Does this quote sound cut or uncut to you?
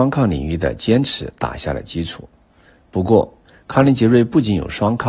uncut